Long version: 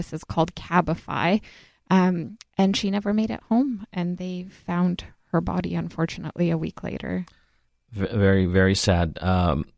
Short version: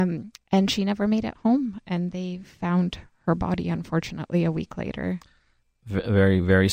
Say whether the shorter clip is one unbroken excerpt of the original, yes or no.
yes